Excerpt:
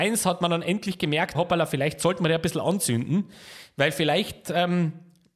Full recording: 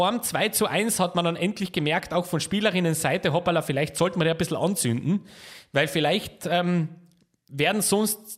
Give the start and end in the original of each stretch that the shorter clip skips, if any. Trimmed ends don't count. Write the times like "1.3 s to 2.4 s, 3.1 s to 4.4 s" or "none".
2.1 s to 3.3 s